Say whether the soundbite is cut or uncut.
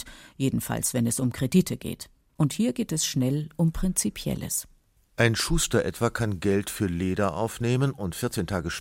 cut